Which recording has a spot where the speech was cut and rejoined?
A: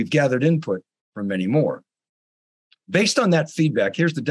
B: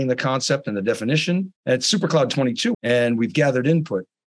B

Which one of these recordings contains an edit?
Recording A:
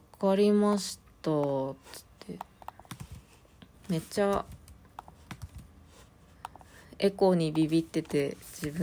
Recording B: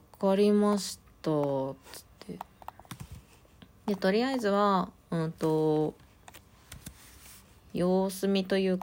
A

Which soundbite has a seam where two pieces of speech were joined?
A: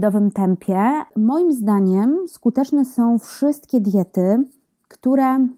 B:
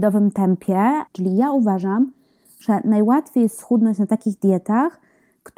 B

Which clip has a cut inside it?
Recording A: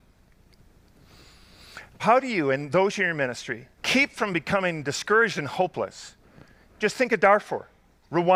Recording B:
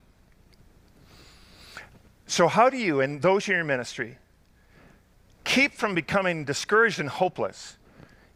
A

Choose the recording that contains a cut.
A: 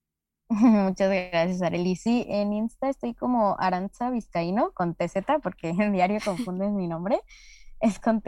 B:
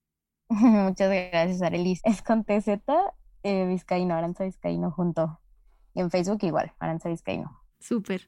B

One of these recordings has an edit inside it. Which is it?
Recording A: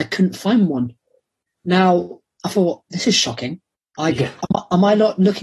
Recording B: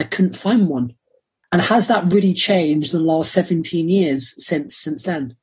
B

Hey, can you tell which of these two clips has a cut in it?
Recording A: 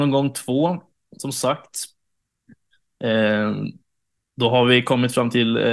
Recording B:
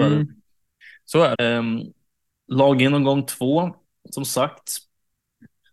B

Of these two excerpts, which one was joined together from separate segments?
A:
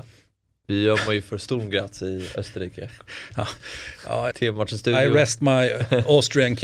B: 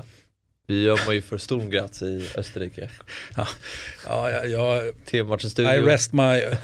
A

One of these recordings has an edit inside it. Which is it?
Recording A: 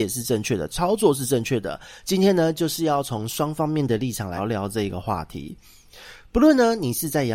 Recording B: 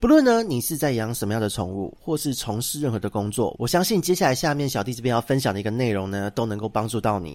A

